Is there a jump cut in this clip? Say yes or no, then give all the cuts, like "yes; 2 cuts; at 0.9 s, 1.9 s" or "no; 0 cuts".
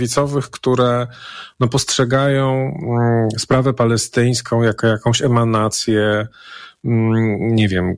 no; 0 cuts